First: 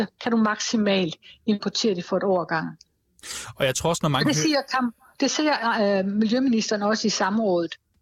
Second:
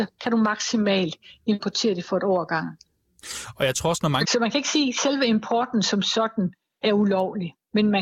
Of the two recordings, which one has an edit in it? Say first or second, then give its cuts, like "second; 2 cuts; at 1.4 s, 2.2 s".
second; 1 cut; at 4.2 s